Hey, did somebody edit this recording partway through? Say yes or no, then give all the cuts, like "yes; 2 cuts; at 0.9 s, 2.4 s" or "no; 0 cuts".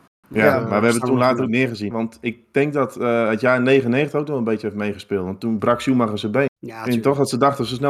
yes; 2 cuts; at 1.9 s, 6.5 s